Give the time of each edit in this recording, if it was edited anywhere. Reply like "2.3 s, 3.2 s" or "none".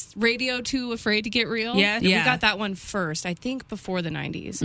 2.0 s